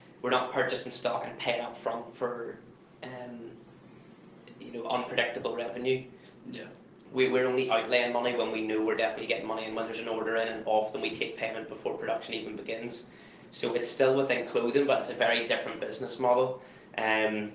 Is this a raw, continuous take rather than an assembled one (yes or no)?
yes